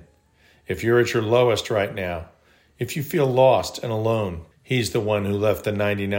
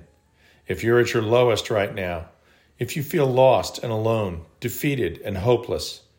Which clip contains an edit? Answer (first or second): first